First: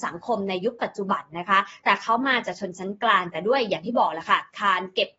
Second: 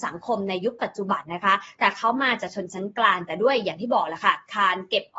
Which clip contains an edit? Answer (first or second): second